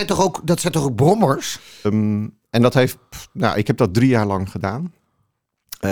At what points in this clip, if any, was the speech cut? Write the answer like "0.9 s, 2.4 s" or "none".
1.8 s